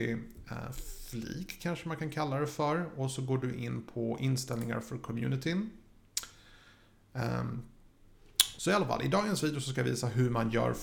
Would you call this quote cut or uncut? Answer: cut